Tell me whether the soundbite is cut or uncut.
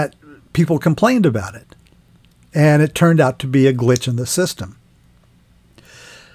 uncut